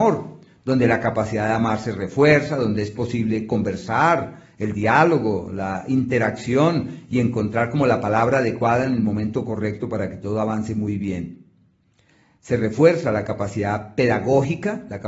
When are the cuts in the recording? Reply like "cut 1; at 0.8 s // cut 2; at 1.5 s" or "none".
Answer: none

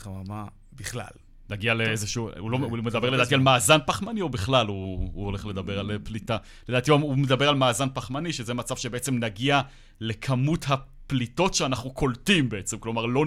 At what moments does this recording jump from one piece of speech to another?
none

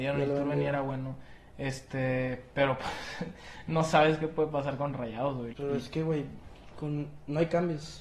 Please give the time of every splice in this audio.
cut 1; at 5.5 s

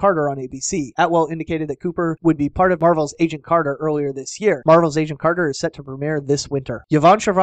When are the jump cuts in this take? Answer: cut 1; at 4.6 s

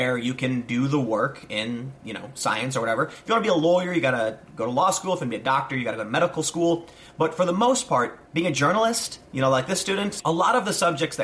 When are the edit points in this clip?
cut 1; at 8.3 s

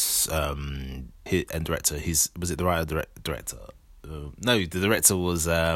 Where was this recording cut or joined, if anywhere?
cut 1; at 1.3 s

